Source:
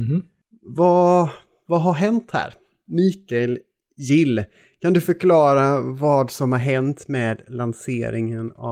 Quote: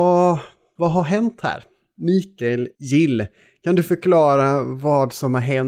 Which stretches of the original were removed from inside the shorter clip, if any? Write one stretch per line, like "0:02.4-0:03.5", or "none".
0:03.6-0:03.9